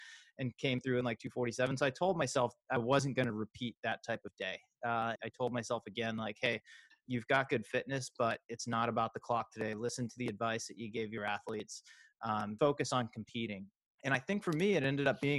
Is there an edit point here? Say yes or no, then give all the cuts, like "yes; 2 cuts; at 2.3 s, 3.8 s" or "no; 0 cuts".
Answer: yes; 2 cuts; at 5.2 s, 12.6 s